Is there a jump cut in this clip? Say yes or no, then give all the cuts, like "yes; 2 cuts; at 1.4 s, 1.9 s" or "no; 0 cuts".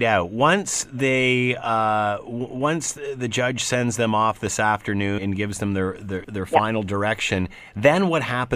yes; 2 cuts; at 5.2 s, 6.2 s